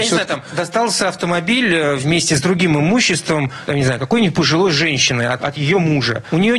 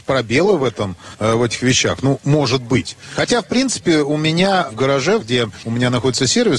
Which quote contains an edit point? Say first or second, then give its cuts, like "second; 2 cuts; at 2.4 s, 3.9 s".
second; 1 cut; at 5.2 s